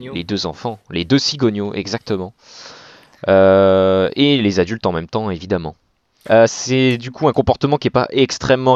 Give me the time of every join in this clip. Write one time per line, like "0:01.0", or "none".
none